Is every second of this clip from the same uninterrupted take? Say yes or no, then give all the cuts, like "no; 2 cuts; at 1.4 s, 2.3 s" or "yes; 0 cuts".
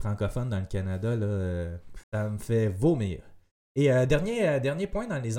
no; 1 cut; at 2.0 s